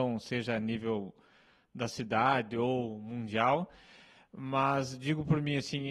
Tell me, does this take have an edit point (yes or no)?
no